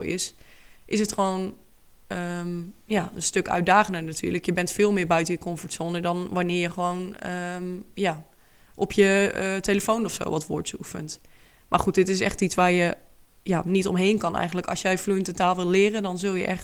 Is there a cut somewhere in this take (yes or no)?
no